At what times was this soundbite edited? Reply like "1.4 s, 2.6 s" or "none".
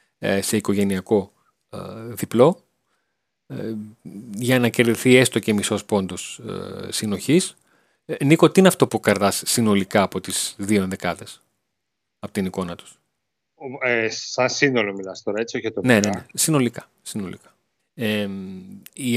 8.9 s, 17.8 s